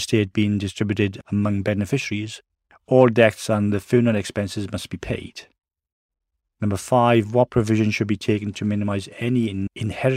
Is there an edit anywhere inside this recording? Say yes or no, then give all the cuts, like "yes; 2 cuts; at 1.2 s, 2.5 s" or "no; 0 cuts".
yes; 1 cut; at 6.5 s